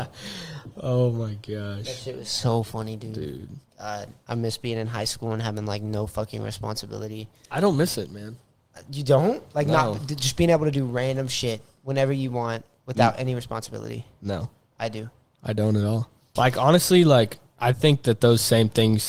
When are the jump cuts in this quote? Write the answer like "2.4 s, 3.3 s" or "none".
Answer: 16.4 s